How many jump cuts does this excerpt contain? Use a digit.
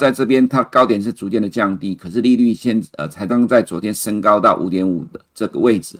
1